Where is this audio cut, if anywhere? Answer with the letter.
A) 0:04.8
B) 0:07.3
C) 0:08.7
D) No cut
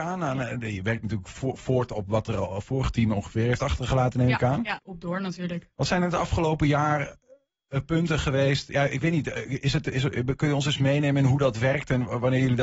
A